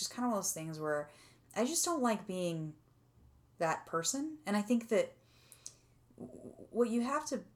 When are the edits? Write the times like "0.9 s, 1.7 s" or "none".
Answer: none